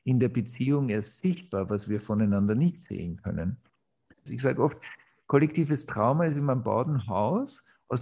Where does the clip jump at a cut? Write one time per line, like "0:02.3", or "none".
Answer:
0:04.3